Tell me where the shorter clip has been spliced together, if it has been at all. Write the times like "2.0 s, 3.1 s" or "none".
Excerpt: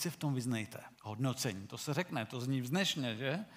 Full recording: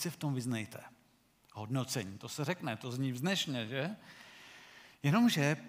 0.9 s

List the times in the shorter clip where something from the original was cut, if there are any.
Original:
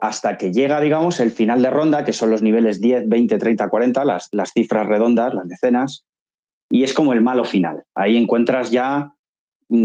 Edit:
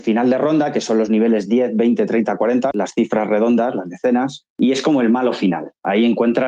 2.7 s, 4.5 s

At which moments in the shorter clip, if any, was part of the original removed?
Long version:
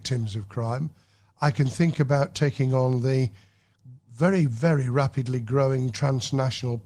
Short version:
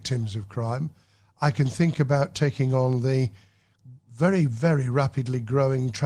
none

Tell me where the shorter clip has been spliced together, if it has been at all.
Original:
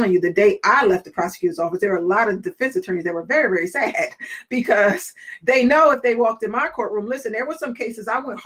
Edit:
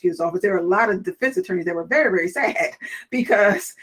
none

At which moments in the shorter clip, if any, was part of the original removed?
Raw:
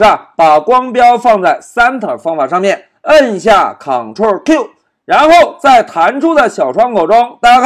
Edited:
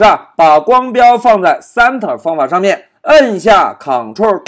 none

